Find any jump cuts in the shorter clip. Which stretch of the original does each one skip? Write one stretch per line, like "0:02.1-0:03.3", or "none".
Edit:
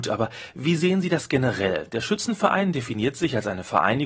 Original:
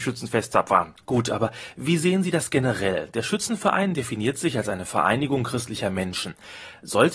none